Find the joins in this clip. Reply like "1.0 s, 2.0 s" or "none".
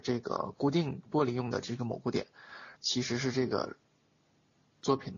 2.7 s